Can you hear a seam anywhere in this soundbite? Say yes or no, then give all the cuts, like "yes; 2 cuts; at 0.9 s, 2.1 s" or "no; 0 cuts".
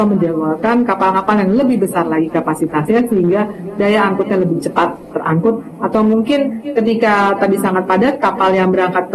yes; 1 cut; at 5.1 s